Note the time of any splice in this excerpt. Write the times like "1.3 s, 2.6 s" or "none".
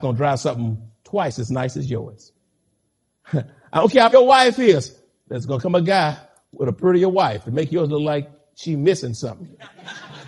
4.1 s